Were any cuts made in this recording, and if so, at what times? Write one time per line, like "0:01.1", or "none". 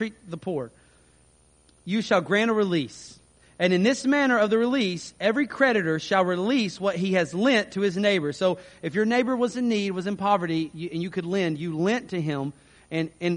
none